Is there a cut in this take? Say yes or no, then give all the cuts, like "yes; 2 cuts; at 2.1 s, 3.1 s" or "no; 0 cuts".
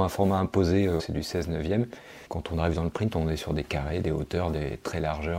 yes; 2 cuts; at 1.0 s, 2.2 s